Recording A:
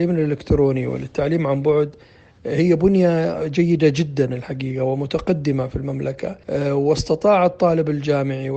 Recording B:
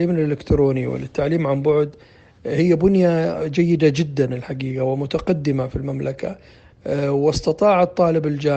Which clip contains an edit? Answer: A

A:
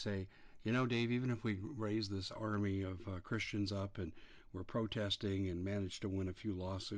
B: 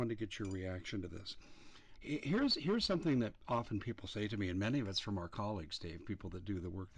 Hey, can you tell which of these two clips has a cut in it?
B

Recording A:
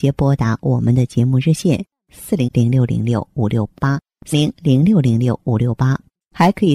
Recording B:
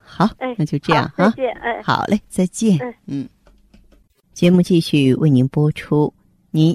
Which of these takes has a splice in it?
A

